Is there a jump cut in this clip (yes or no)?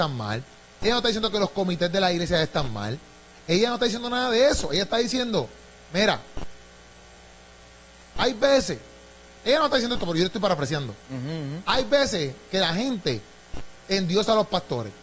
no